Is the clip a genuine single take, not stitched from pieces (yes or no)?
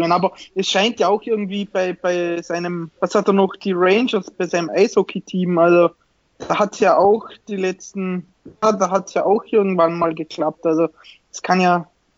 yes